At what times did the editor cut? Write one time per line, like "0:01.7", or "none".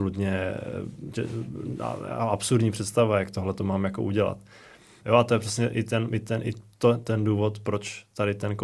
0:05.0